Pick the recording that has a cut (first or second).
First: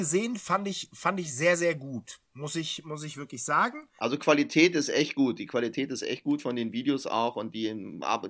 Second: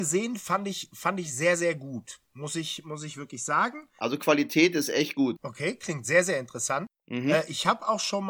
second